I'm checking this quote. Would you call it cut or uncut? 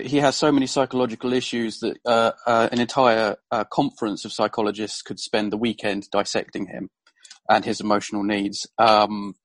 uncut